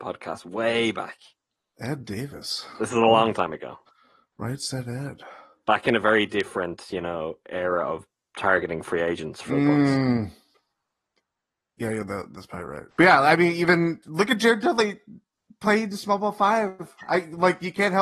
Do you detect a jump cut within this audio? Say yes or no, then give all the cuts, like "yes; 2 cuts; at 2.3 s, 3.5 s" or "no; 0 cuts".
yes; 1 cut; at 12.9 s